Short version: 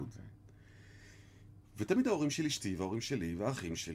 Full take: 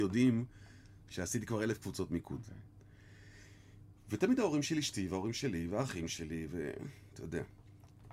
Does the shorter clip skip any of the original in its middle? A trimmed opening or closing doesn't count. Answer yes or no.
no